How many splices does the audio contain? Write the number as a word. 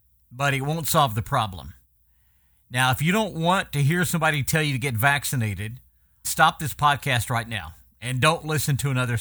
one